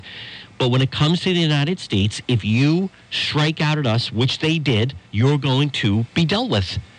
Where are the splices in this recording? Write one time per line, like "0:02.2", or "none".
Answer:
0:05.1